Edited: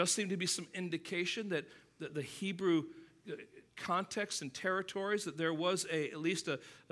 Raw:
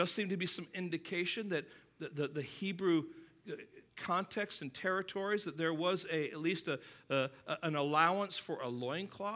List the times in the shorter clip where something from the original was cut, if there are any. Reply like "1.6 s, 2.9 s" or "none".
2.1 s